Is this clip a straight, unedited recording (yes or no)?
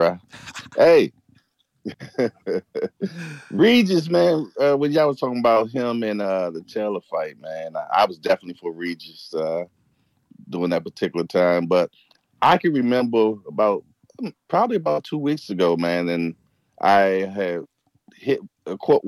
yes